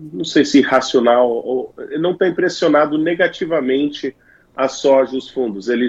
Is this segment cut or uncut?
uncut